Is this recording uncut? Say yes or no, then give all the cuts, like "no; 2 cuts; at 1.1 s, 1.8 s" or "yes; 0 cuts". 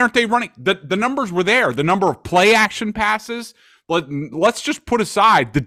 yes; 0 cuts